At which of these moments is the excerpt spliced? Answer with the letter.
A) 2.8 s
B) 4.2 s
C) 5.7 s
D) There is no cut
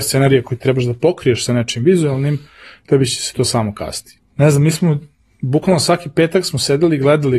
B